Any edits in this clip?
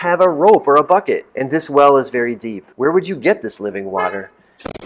yes; 2 cuts; at 1.3 s, 2.7 s

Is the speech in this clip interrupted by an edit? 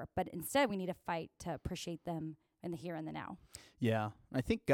no; 0 cuts

